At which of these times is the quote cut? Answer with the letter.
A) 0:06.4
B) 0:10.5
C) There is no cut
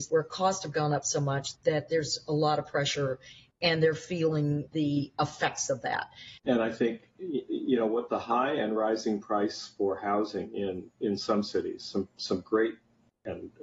A